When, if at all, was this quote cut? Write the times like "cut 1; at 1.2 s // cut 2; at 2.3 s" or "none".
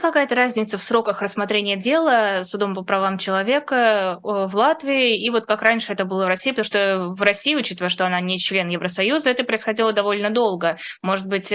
none